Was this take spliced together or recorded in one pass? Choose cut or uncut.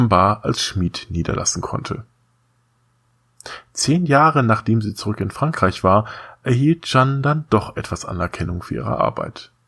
uncut